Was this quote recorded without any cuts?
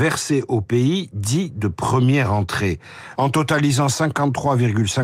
no; 1 cut; at 3.2 s

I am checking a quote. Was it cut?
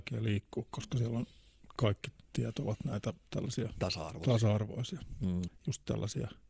yes; 1 cut; at 5.5 s

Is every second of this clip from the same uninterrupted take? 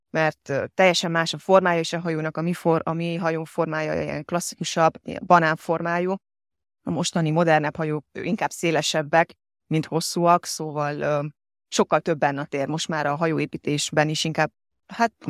yes; 0 cuts

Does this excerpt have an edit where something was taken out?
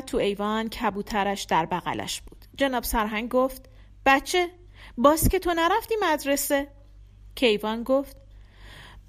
no; 0 cuts

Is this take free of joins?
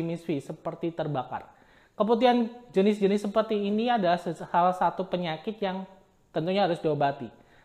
yes; 0 cuts

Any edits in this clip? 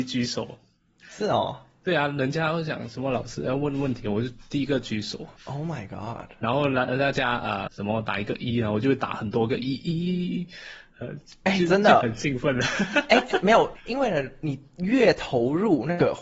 yes; 3 cuts; at 5.4 s, 7.7 s, 13.7 s

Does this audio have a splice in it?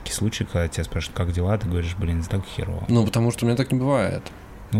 yes; 1 cut; at 2.2 s

